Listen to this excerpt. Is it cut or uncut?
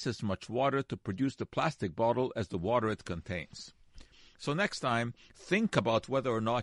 uncut